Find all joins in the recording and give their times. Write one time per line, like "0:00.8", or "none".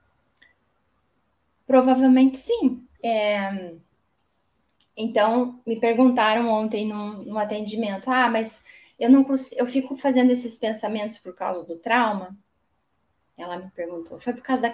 0:03.0